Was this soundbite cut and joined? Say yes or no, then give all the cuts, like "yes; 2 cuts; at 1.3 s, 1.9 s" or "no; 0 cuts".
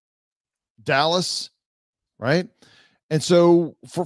yes; 1 cut; at 2.1 s